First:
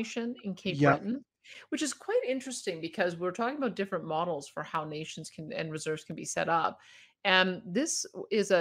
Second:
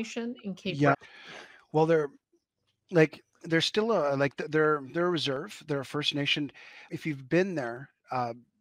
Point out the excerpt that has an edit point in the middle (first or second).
second